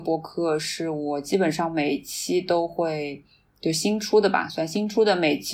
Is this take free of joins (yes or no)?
yes